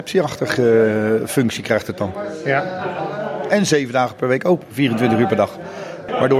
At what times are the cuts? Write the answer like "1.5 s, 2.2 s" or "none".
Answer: 3.5 s